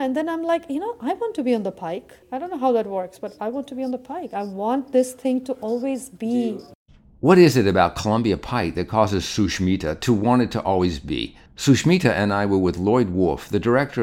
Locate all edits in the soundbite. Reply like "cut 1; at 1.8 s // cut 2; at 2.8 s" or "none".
cut 1; at 2.2 s